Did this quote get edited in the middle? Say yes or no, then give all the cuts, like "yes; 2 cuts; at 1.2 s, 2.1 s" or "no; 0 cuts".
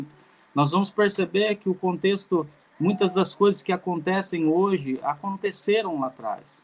no; 0 cuts